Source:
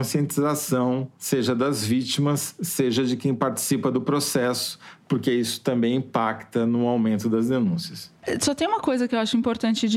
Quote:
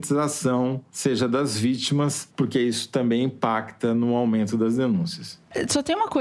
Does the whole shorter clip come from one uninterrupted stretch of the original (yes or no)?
no